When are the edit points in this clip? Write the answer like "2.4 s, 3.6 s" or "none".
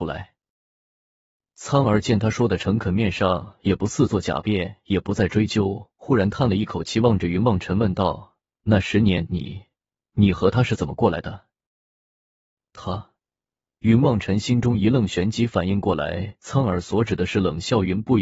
none